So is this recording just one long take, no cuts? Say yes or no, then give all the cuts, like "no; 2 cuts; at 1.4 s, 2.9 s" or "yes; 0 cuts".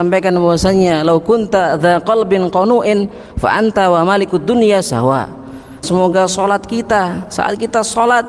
no; 1 cut; at 5.8 s